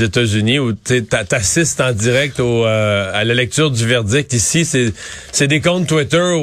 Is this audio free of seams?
yes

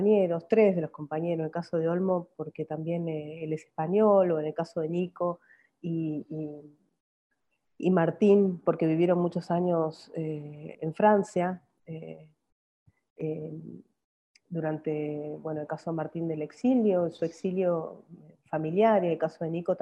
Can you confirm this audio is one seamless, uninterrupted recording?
no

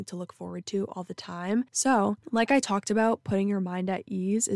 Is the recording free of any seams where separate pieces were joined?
no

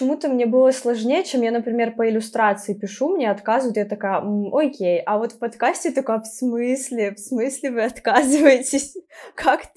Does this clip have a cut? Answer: no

